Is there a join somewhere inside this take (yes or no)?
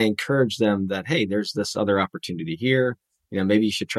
no